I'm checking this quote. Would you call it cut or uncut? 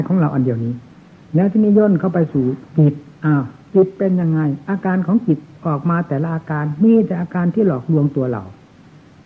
cut